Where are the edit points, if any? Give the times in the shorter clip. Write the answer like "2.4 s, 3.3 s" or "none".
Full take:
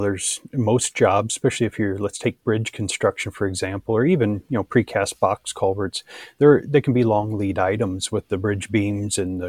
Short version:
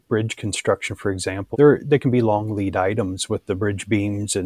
1.5 s